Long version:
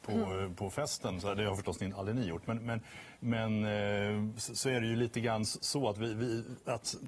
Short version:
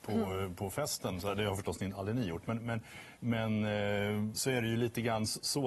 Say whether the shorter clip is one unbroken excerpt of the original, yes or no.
no